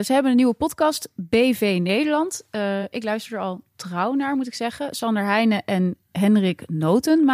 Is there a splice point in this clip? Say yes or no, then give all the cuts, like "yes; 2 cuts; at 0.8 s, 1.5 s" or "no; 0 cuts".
no; 0 cuts